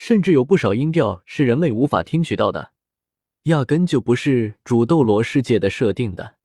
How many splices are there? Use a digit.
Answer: 1